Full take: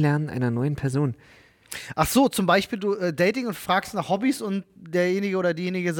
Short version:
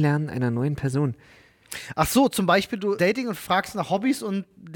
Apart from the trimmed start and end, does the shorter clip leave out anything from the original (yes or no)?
yes